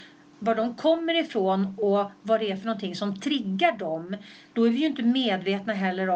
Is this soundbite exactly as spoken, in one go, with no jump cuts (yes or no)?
no